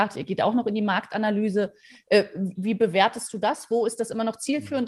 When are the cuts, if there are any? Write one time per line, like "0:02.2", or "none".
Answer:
0:02.5